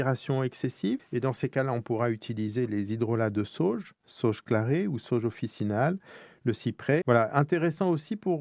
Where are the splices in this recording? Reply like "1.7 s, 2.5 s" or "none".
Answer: 1.0 s, 7.0 s